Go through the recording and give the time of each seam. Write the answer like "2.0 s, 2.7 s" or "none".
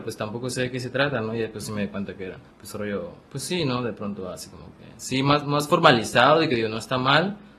2.5 s